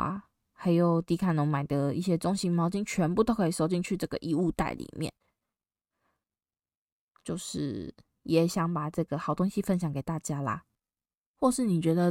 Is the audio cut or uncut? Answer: uncut